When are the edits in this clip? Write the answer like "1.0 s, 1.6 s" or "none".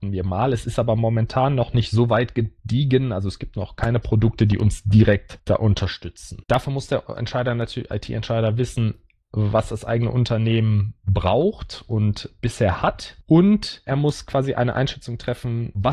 6.4 s